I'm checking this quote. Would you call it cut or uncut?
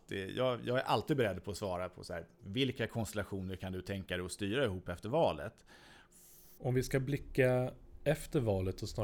cut